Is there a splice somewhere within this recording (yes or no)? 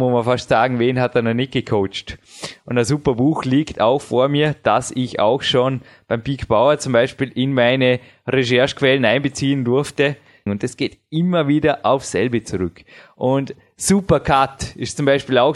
yes